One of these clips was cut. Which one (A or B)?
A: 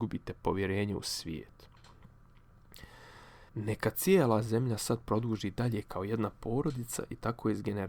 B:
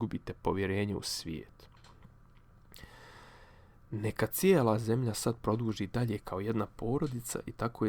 A